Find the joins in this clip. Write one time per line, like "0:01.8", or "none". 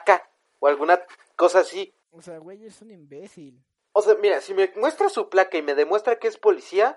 0:02.0